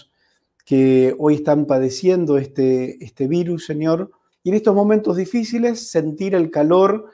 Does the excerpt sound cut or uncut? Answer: cut